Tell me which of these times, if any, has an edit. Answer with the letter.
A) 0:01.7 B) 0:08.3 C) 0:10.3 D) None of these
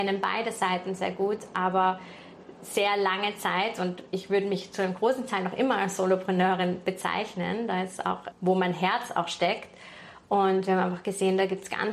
B